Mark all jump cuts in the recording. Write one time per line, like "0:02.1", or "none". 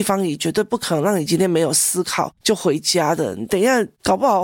none